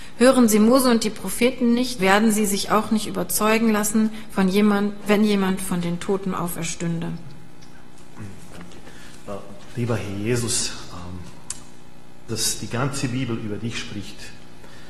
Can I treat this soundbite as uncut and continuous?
no; 3 cuts; at 2.0 s, 9.7 s, 12.3 s

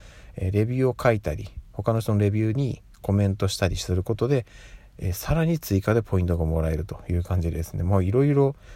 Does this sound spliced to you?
no; 0 cuts

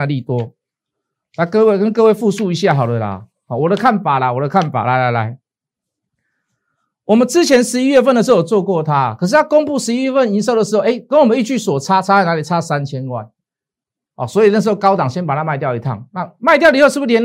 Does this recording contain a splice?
no; 0 cuts

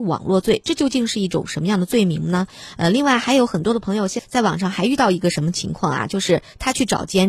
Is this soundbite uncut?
no; 1 cut; at 4.2 s

